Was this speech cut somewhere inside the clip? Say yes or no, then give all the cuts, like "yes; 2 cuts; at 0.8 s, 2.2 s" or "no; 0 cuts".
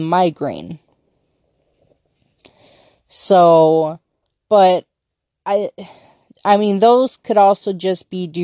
no; 0 cuts